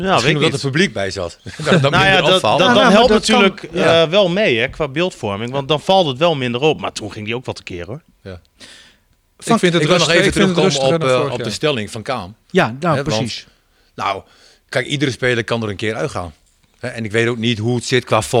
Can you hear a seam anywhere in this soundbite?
no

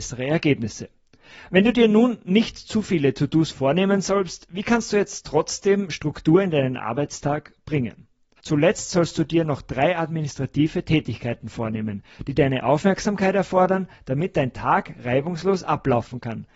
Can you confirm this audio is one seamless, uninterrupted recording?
no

